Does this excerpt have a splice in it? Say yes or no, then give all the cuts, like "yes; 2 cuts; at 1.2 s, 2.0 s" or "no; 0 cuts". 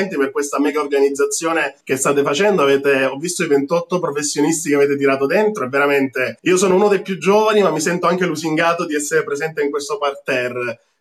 yes; 2 cuts; at 1.8 s, 6.4 s